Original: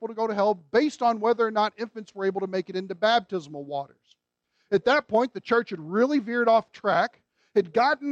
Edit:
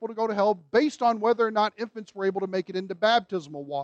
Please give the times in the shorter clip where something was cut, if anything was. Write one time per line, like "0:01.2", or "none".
none